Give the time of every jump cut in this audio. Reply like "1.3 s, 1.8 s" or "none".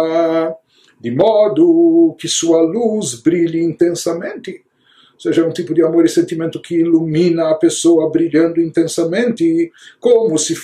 none